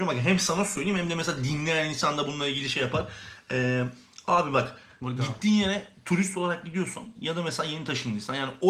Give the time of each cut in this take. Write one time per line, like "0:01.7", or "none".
none